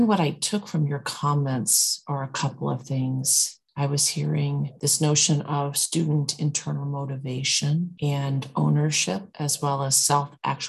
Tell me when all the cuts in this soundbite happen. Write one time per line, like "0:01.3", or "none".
none

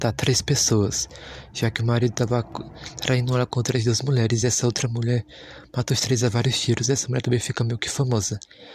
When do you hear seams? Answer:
none

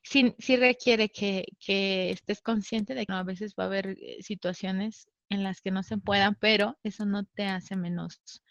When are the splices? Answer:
0:03.1

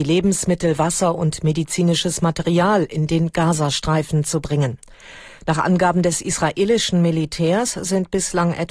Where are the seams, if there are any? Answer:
none

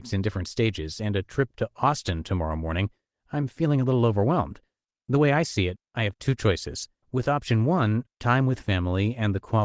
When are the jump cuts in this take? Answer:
0:07.0
0:08.1

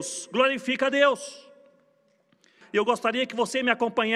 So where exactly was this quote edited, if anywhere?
0:02.6

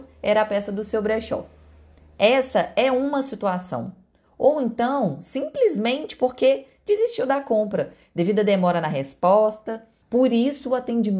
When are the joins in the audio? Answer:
0:10.0

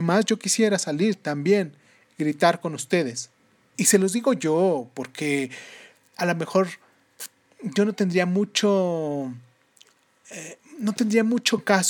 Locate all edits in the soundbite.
0:03.7

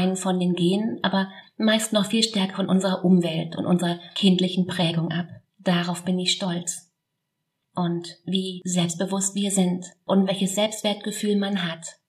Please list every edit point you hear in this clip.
0:05.5

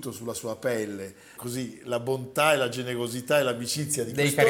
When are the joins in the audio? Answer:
0:01.4

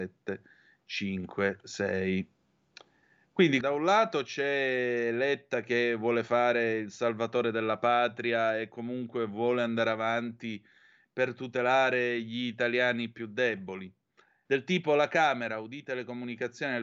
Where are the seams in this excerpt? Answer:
0:03.6
0:14.5

